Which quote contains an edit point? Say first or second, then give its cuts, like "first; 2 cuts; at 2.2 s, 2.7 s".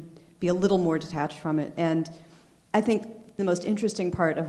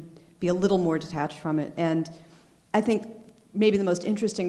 first; 1 cut; at 3.4 s